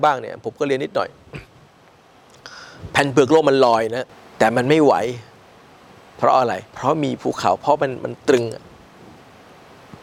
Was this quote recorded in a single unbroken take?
no; 1 cut; at 6.6 s

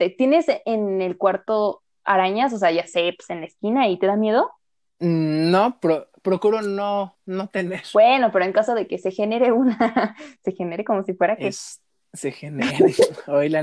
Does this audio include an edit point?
no; 0 cuts

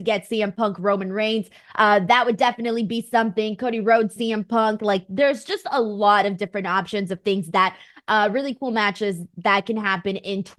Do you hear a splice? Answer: no; 0 cuts

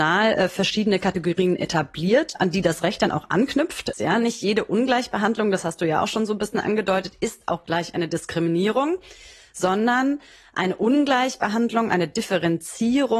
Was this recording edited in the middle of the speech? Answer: yes; 1 cut; at 3.9 s

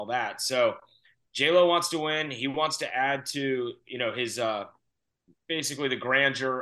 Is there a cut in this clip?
no; 0 cuts

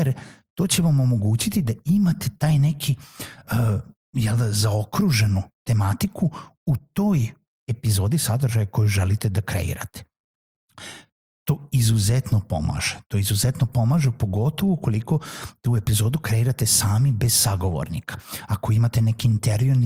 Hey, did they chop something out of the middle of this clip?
no; 0 cuts

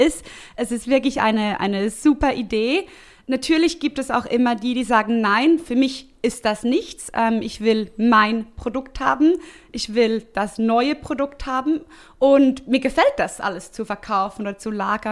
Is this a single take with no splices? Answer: yes; 0 cuts

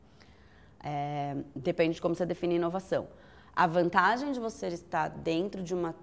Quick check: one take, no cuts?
yes; 0 cuts

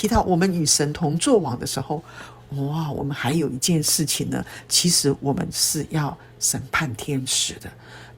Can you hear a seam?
no; 0 cuts

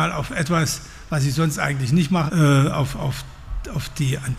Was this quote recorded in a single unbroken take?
no; 1 cut; at 2.3 s

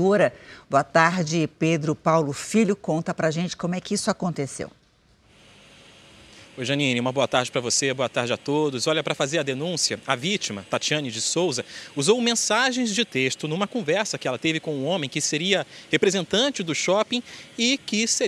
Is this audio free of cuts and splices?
yes; 0 cuts

